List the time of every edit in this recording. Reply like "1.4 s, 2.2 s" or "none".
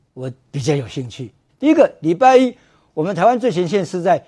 1.5 s